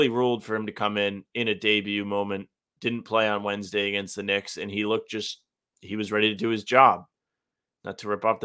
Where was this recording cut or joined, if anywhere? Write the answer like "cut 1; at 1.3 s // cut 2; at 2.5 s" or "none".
none